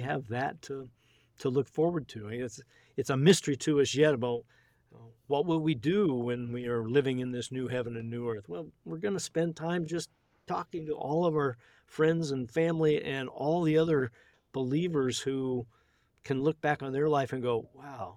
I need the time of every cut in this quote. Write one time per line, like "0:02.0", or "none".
none